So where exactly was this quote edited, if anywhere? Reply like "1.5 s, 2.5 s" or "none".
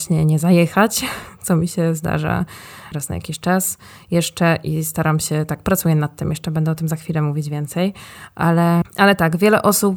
2.9 s, 8.8 s